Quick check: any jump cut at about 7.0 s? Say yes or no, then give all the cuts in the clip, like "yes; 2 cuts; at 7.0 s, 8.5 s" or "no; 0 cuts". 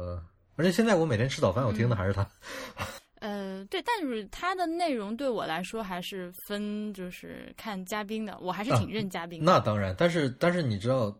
no; 1 cut; at 3.0 s